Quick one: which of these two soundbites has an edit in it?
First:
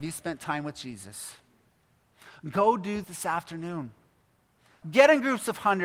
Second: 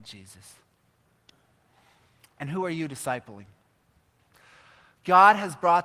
first; 2 cuts; at 3.0 s, 4.8 s

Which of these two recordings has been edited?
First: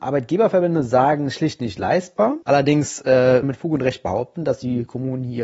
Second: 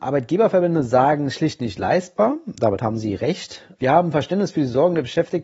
first; 2 cuts; at 2.4 s, 3.4 s

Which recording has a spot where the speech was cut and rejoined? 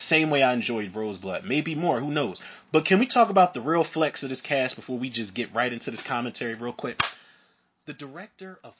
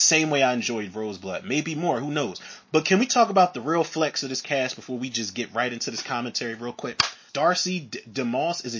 second; 1 cut; at 7.3 s

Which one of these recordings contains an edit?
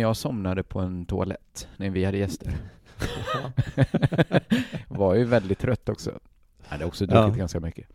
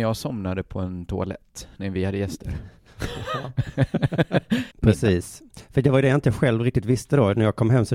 second; 1 cut; at 4.7 s

